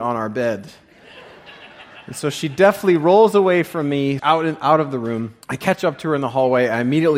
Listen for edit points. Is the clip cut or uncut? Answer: cut